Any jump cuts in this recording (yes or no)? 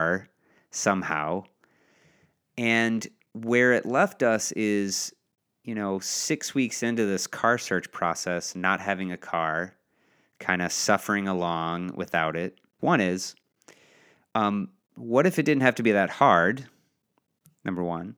yes